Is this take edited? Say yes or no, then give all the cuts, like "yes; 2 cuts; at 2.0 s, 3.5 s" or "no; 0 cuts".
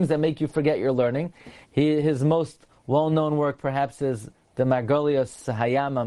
yes; 1 cut; at 1.6 s